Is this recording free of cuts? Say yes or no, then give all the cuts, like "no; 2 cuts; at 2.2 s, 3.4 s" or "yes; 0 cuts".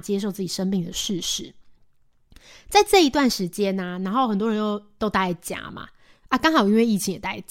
yes; 0 cuts